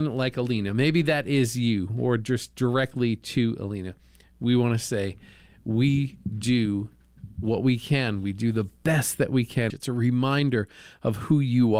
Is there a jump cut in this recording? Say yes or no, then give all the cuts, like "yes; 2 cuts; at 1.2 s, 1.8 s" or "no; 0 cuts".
yes; 1 cut; at 9.7 s